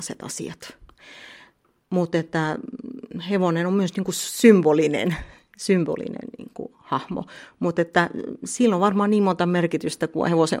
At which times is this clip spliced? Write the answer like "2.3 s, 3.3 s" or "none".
none